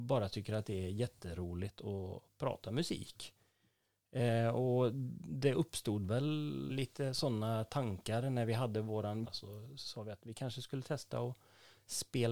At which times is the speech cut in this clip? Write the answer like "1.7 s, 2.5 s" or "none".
6.7 s, 9.2 s